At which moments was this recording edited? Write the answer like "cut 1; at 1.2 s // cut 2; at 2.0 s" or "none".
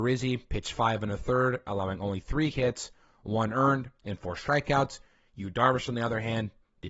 cut 1; at 4.0 s